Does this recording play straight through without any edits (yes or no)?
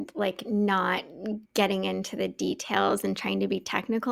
no